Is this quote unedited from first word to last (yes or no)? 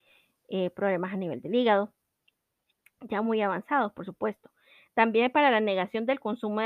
yes